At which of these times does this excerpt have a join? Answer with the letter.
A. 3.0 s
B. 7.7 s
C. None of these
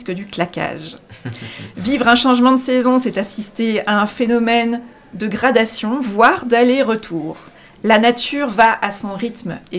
B